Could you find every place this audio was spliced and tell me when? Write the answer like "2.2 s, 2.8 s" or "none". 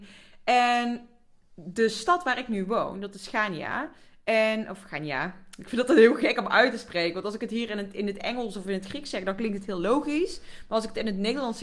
none